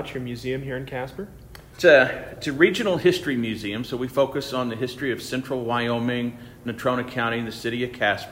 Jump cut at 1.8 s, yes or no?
yes